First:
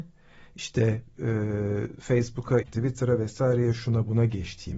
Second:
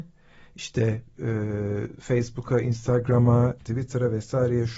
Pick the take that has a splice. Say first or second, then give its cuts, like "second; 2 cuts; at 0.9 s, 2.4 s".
first; 1 cut; at 2.6 s